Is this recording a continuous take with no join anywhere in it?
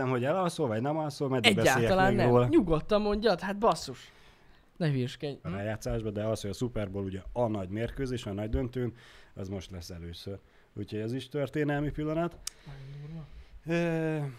no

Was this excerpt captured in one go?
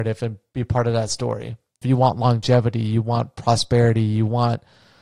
no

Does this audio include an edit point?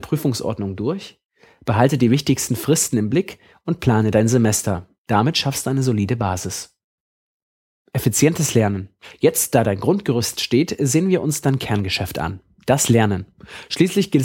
no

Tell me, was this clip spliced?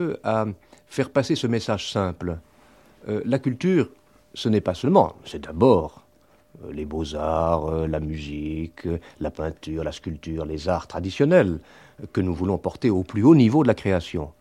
no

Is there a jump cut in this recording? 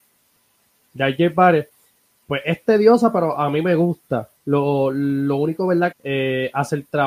yes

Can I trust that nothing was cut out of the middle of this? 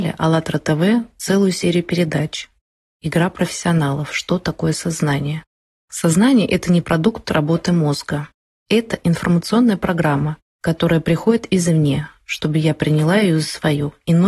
no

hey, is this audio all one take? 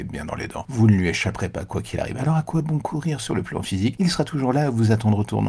yes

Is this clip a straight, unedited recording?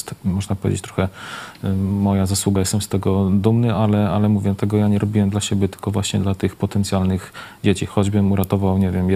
yes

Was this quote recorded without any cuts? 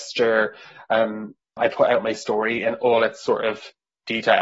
no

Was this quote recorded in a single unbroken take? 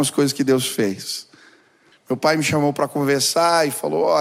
no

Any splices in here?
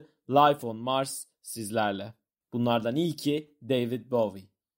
yes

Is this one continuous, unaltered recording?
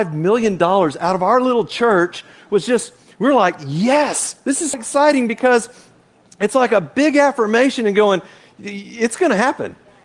no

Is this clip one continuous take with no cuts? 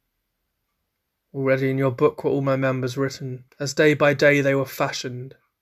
no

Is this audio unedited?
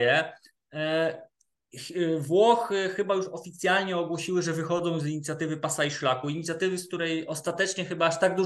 yes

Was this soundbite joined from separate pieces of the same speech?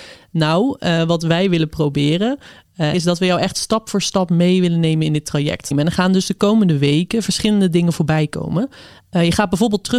yes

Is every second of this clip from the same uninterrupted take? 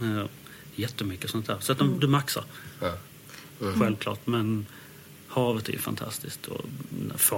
no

